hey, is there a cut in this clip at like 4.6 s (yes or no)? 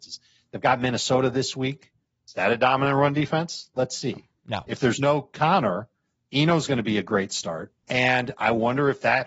no